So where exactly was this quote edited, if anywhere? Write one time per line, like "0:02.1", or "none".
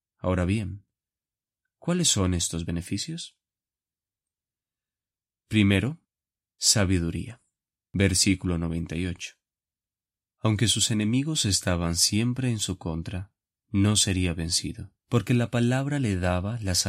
0:07.7
0:15.0